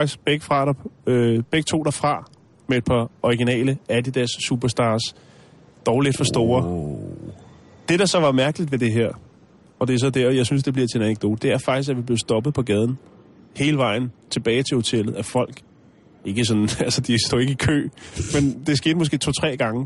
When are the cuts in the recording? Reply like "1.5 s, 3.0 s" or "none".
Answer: none